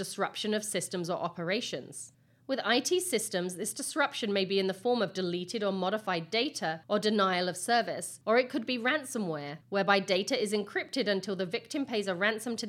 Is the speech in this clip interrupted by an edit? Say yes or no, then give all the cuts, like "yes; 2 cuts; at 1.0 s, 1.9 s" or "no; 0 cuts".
no; 0 cuts